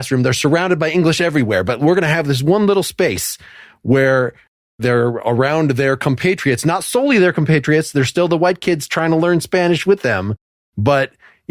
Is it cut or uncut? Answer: uncut